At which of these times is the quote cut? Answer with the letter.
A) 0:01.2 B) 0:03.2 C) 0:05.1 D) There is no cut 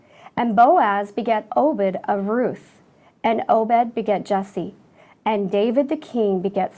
C